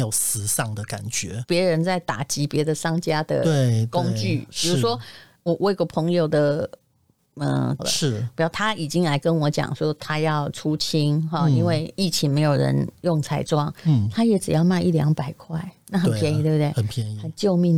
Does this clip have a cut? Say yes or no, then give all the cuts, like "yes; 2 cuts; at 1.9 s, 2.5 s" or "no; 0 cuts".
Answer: yes; 2 cuts; at 1.4 s, 7.8 s